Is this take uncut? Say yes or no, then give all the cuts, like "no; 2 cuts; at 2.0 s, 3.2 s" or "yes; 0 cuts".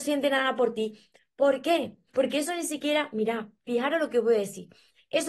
no; 1 cut; at 2.1 s